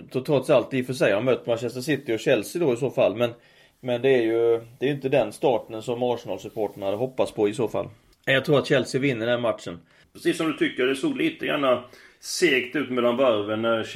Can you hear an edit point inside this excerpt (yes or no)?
yes